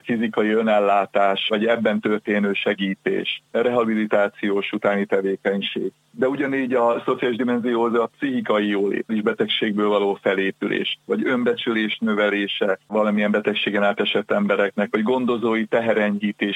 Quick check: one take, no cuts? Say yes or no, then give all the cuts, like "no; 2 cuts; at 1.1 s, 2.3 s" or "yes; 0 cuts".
no; 2 cuts; at 9.1 s, 11.1 s